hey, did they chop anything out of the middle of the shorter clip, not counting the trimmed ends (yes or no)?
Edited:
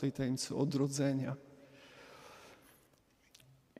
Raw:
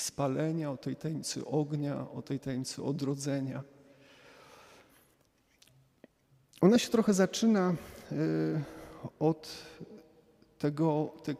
no